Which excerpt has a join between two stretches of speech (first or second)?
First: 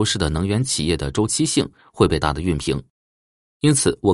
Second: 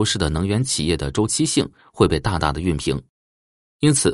first